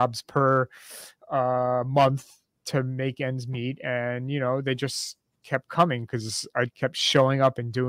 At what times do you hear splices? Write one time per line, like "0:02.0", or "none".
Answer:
0:05.4
0:06.7